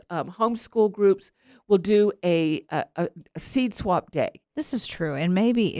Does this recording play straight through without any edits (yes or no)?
no